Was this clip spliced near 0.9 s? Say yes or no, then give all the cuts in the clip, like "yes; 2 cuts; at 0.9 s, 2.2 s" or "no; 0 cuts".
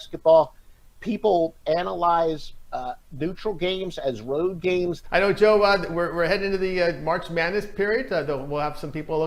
no; 1 cut; at 5.0 s